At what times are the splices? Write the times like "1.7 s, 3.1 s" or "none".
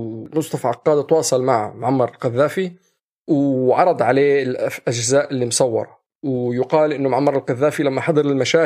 none

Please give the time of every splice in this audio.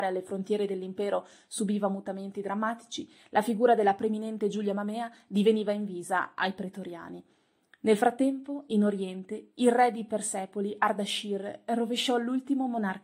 none

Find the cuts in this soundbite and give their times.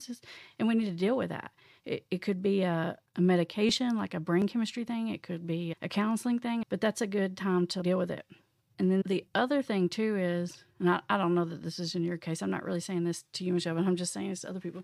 6.6 s

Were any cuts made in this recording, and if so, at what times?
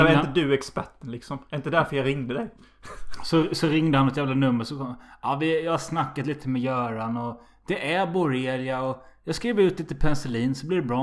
none

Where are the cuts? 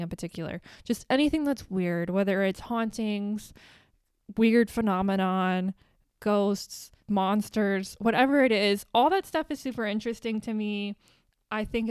7.0 s

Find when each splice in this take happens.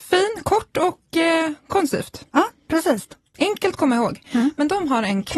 3.3 s

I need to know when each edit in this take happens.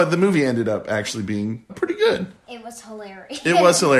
1.7 s

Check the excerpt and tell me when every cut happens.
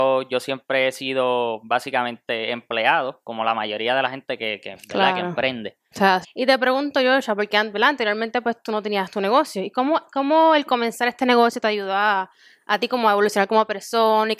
6.2 s

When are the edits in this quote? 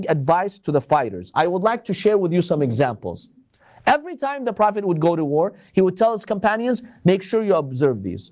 none

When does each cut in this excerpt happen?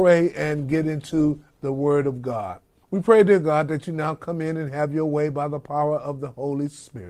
2.8 s

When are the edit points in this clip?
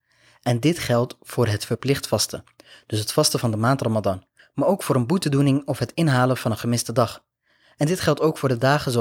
none

